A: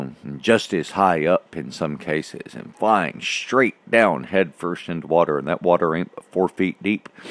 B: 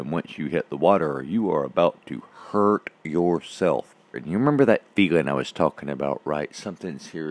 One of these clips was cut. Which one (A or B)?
B